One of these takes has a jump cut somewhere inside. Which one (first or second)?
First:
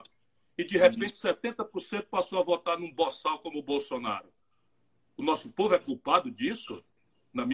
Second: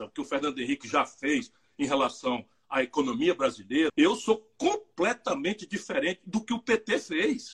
second